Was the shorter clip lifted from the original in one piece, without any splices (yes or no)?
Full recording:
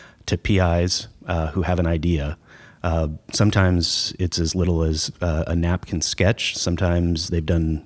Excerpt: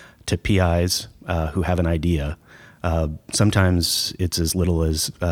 yes